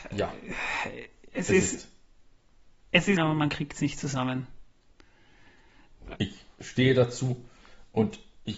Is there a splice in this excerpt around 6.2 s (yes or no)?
yes